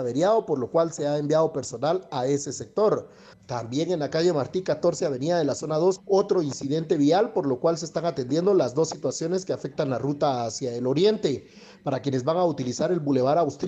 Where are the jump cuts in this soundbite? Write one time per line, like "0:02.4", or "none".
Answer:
0:03.3
0:06.0